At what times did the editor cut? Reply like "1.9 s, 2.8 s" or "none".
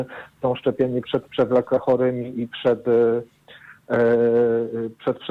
1.0 s